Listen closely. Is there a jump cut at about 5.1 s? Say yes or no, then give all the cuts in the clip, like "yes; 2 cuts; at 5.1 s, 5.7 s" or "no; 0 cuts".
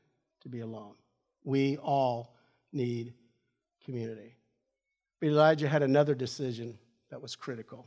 no; 0 cuts